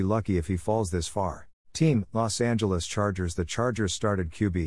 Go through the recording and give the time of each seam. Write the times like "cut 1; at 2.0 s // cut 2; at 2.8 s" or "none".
cut 1; at 1.6 s